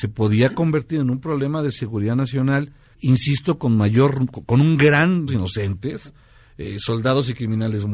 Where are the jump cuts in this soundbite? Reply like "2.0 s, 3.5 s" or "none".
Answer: 2.9 s, 5.3 s